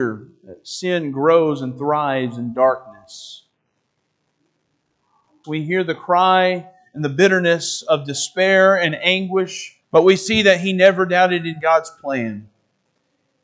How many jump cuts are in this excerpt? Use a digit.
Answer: 2